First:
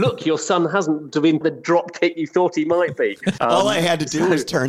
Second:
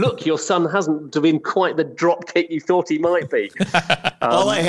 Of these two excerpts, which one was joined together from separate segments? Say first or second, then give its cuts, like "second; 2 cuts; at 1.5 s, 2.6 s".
first; 2 cuts; at 1.4 s, 3.4 s